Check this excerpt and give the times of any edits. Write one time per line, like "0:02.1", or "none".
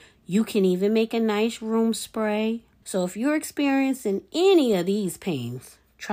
0:02.8